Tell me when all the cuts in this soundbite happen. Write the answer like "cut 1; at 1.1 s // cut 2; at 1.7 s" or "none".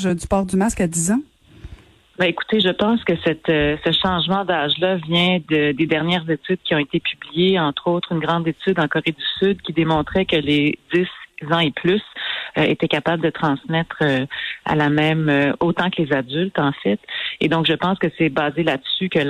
none